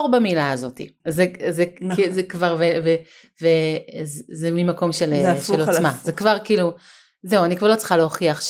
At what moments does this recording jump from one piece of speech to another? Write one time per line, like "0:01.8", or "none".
0:01.0